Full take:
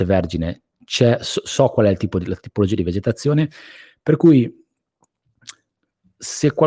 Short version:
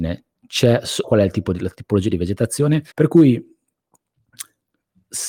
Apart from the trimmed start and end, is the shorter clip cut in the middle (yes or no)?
yes